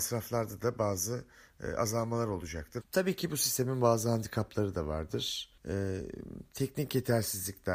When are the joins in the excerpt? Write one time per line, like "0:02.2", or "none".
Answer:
0:02.8
0:05.6